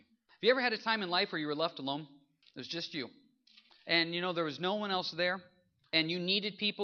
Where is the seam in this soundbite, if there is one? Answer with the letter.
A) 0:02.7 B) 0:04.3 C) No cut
C